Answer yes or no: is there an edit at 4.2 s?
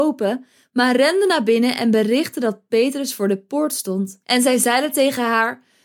yes